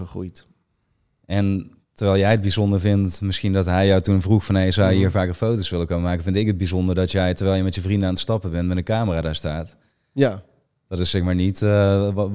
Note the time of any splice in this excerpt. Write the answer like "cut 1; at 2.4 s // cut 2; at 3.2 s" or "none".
none